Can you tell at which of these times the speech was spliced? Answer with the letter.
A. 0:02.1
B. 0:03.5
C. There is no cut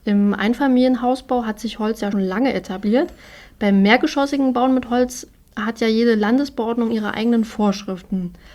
A